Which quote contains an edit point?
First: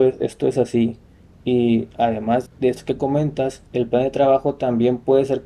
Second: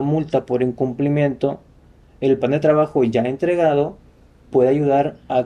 first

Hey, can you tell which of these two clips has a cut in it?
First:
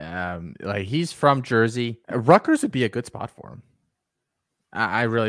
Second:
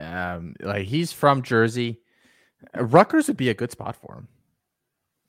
first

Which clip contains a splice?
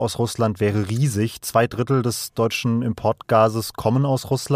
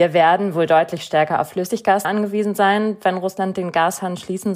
second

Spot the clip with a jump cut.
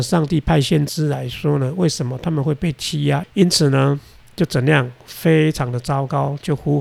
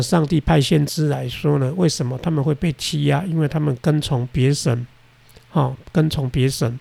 first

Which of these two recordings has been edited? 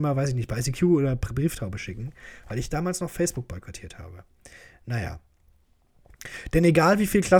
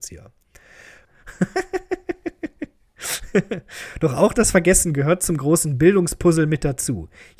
second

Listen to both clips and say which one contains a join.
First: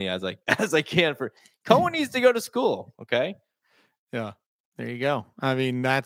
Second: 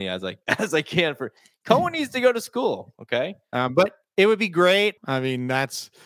second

